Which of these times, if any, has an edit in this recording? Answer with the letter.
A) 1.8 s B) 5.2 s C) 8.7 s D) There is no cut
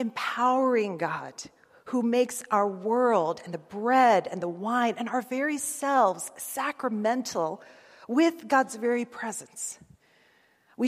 D